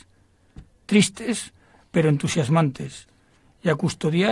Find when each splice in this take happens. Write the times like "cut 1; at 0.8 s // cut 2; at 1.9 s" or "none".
none